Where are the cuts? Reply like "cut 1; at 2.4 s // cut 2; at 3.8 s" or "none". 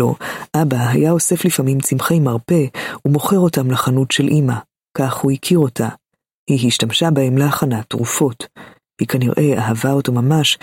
none